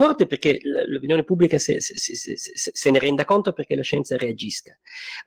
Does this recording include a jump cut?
yes; 1 cut; at 1.8 s

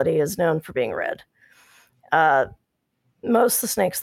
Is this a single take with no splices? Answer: yes; 0 cuts

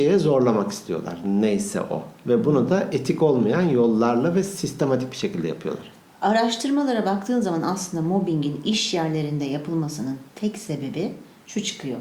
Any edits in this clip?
no; 0 cuts

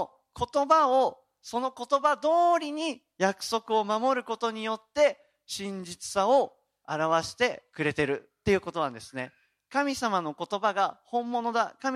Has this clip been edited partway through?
no; 0 cuts

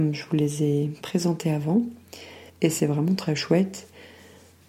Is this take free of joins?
no; 1 cut; at 2.5 s

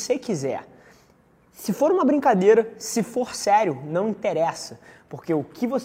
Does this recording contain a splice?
no; 0 cuts

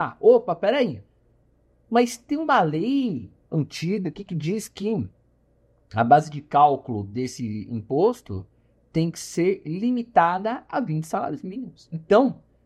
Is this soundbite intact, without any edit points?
yes; 0 cuts

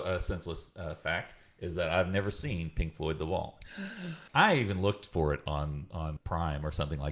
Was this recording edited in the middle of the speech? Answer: yes; 2 cuts; at 4.3 s, 6.2 s

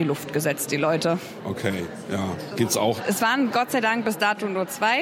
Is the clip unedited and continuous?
yes; 0 cuts

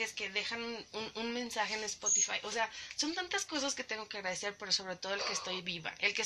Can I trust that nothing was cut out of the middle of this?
yes; 0 cuts

